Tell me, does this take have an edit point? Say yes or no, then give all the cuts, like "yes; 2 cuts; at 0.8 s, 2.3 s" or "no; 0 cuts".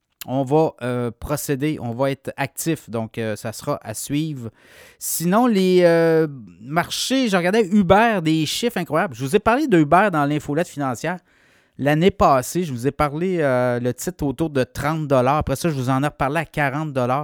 no; 0 cuts